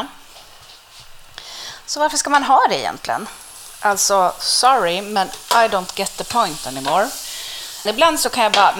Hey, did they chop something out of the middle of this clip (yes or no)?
yes